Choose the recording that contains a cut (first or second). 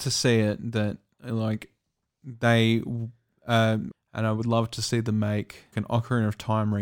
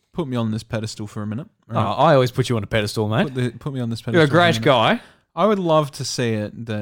first